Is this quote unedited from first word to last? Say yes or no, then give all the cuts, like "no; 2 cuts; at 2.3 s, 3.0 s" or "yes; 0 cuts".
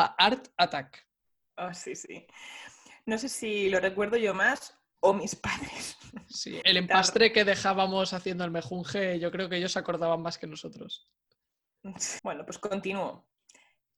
no; 2 cuts; at 6.6 s, 12.2 s